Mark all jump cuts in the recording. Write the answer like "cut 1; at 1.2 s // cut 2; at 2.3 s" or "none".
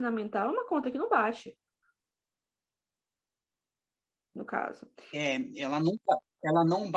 none